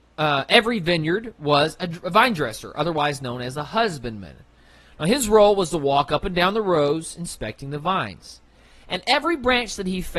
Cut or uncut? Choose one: uncut